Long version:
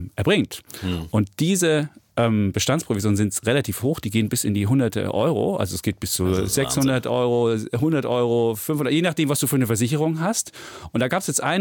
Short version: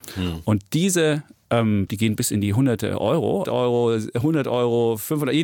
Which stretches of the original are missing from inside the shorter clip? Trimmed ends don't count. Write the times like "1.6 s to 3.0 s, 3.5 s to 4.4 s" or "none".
2.5 s to 4.0 s, 5.6 s to 7.0 s